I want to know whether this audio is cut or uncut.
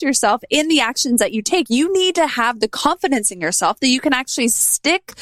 uncut